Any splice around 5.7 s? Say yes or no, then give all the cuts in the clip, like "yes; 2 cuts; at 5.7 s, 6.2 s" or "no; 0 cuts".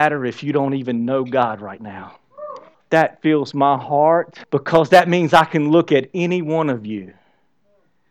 no; 2 cuts; at 2.7 s, 4.4 s